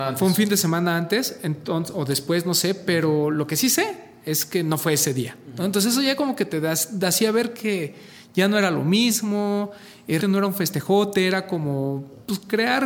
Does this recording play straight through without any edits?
no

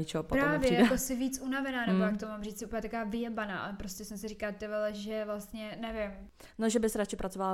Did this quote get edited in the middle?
no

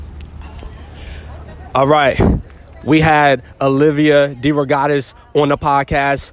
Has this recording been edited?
no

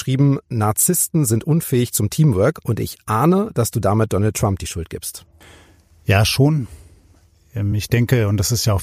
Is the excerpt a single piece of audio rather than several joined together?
yes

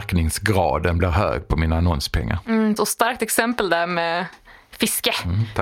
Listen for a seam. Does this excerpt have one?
yes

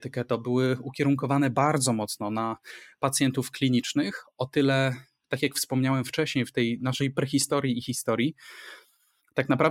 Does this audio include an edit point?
no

